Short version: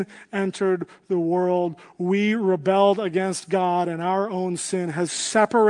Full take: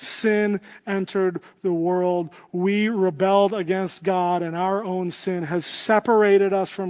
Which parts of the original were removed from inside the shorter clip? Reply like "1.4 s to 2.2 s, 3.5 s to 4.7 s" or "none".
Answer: none